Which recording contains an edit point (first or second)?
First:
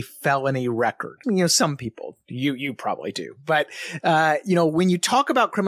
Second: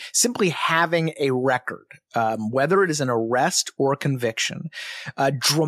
first